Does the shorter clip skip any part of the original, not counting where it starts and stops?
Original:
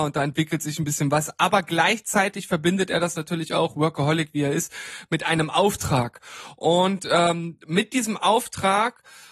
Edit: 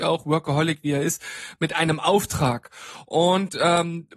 no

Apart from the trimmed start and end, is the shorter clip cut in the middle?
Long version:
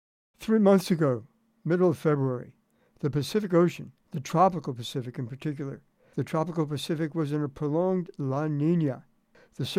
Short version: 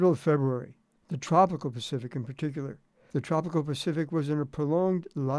yes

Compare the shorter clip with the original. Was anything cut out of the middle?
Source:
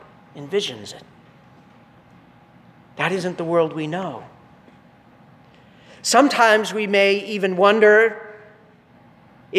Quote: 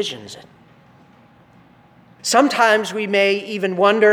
yes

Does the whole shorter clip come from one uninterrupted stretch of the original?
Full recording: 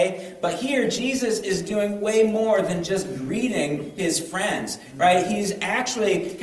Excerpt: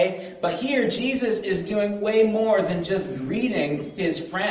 yes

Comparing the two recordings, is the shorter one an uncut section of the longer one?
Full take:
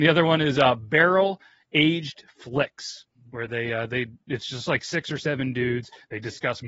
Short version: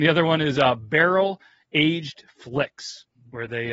yes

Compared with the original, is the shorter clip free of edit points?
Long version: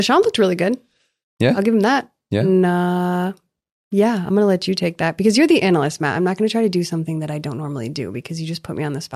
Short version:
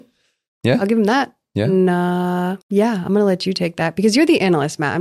no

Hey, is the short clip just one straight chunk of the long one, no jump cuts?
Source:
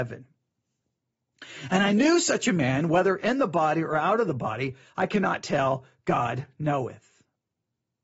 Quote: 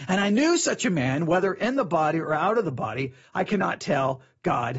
yes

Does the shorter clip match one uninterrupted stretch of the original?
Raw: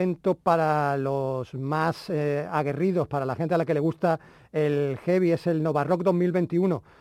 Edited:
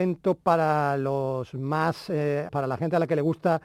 no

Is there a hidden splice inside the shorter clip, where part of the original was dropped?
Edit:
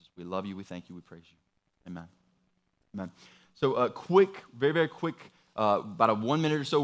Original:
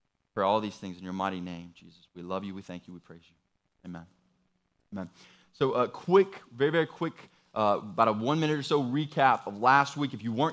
no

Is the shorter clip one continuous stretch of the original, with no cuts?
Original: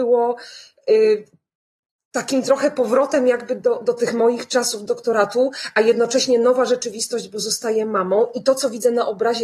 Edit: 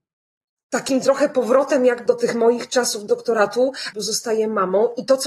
no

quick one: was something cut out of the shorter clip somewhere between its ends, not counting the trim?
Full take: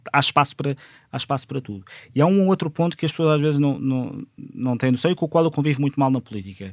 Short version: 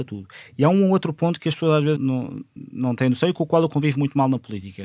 yes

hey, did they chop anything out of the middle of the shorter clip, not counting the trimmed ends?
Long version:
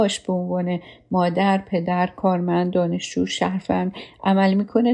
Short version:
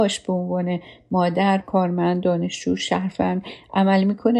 yes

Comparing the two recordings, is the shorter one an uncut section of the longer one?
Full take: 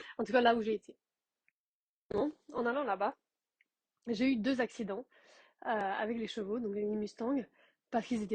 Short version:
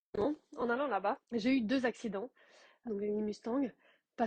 no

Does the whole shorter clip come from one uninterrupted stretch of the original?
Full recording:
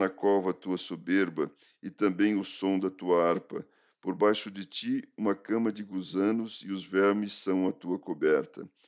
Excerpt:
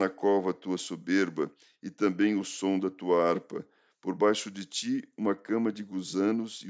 yes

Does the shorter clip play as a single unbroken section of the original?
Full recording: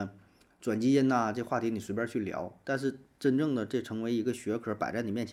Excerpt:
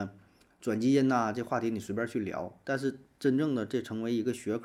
yes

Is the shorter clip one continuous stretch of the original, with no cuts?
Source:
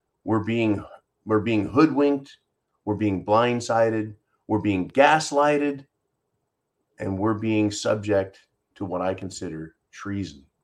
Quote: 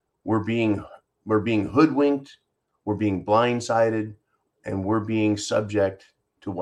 no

